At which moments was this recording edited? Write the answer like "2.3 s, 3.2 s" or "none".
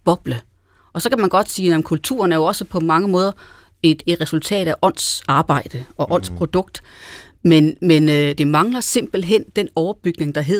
none